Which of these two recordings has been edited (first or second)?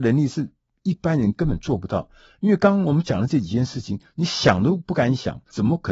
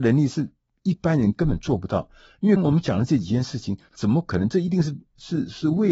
second